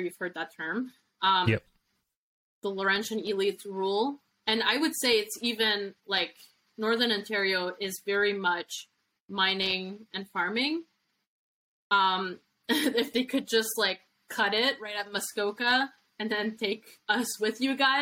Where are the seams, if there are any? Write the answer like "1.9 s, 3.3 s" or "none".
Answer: none